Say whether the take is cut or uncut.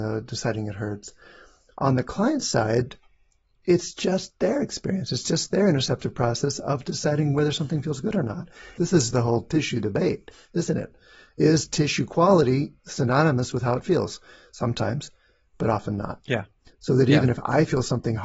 cut